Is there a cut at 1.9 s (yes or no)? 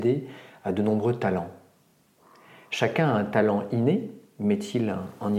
no